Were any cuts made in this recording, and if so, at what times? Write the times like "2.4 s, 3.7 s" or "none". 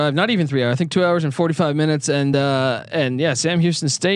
none